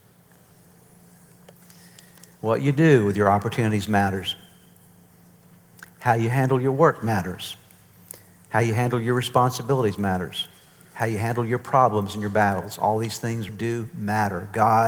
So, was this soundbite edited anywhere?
yes; 1 cut; at 13.5 s

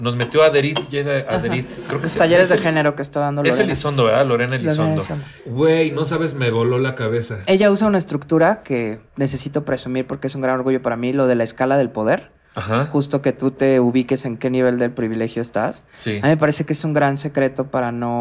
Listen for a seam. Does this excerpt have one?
yes; 2 cuts; at 5.4 s, 9.1 s

